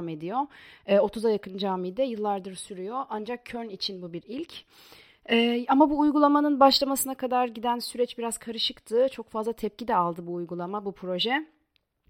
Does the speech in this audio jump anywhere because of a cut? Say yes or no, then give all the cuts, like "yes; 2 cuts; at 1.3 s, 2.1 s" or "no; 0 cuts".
no; 0 cuts